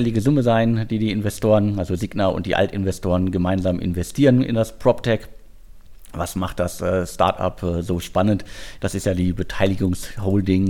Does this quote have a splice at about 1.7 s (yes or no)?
no